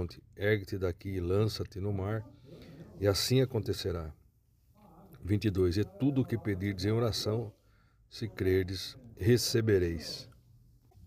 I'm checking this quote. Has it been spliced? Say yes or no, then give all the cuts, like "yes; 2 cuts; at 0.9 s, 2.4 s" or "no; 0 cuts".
no; 0 cuts